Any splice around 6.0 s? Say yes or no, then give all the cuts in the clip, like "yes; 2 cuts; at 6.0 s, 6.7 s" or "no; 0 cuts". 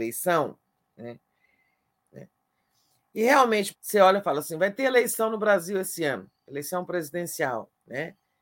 no; 2 cuts; at 2.0 s, 3.7 s